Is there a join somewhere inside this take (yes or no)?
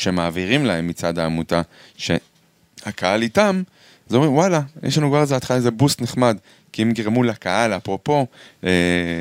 no